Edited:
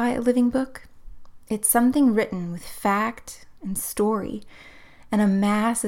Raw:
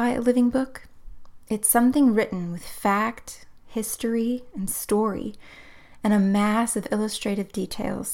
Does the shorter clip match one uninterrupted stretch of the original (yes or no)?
no